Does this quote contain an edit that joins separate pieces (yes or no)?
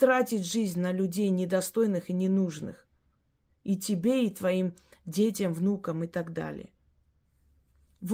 no